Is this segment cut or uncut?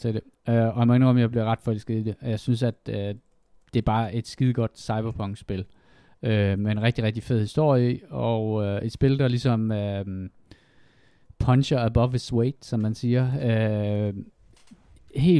uncut